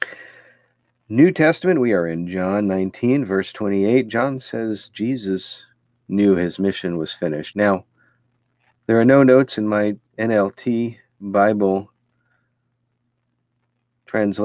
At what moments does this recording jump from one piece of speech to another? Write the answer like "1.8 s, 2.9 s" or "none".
7.5 s, 10.1 s